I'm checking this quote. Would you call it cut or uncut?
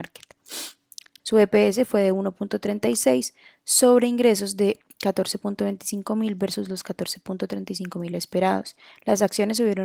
cut